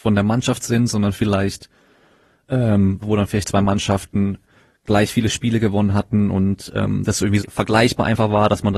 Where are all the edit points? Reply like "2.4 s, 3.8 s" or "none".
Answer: 3.0 s, 7.4 s